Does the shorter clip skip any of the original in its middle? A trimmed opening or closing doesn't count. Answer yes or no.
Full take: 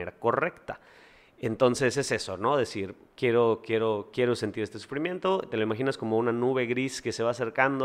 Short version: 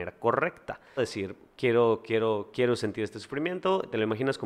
yes